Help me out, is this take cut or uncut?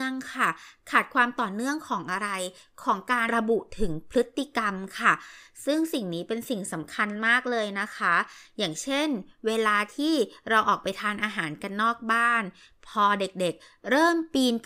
cut